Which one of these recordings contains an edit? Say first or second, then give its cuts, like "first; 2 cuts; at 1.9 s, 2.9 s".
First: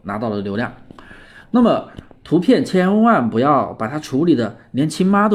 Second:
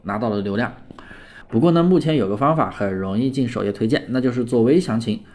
second; 1 cut; at 1.4 s